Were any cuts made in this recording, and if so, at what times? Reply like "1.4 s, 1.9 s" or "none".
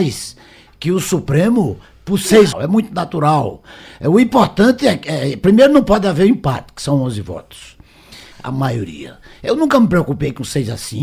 2.5 s, 8.3 s